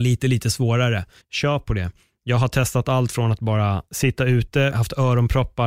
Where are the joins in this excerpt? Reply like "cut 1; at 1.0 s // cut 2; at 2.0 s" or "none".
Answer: cut 1; at 1.2 s // cut 2; at 4.7 s